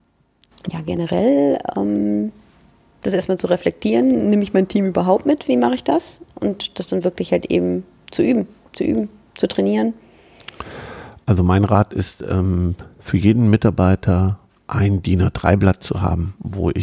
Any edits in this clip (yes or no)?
no